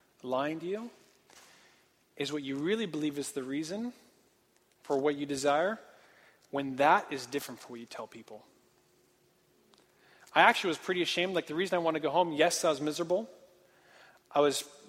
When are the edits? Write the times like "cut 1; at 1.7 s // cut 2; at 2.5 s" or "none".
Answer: none